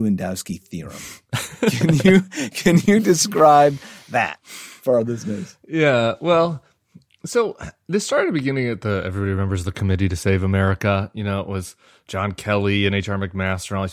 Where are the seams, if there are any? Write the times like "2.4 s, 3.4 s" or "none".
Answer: none